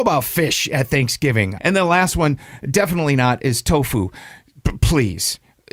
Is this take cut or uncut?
cut